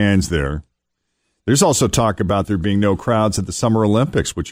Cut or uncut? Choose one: uncut